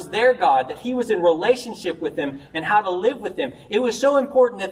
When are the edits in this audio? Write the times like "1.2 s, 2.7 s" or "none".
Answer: none